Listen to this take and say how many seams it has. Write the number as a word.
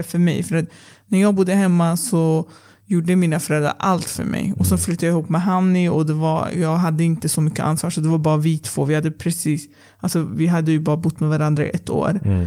zero